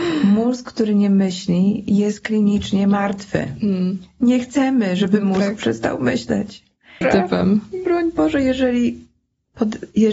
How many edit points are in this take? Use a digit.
1